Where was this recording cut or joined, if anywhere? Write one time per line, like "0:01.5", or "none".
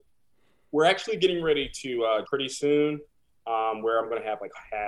0:02.2